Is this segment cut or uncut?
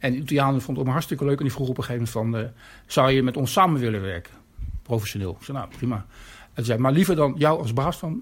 uncut